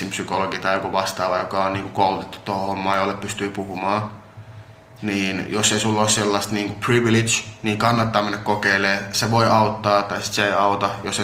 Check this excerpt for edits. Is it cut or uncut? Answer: uncut